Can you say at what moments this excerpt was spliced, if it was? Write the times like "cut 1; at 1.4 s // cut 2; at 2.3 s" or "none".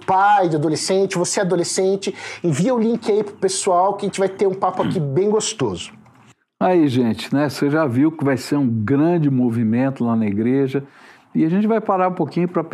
none